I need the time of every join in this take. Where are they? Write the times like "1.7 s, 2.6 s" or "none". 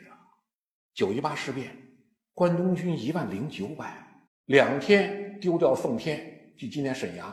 4.3 s